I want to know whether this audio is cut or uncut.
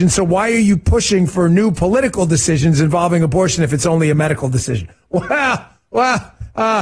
uncut